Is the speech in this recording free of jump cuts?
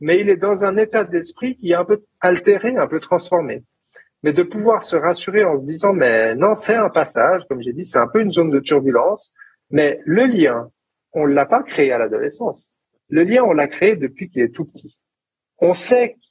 yes; 0 cuts

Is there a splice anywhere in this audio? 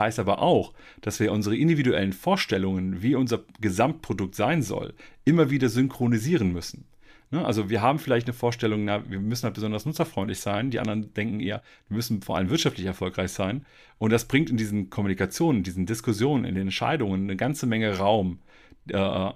no; 0 cuts

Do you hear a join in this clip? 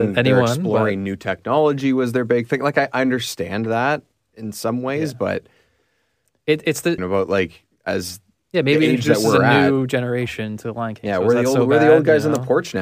yes; 1 cut; at 7.0 s

